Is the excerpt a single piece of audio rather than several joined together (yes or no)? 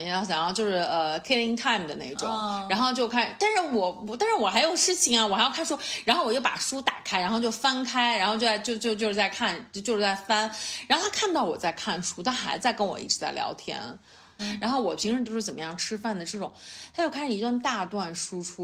no